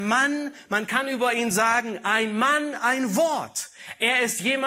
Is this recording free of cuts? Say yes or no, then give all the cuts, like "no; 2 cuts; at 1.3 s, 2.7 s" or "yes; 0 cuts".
yes; 0 cuts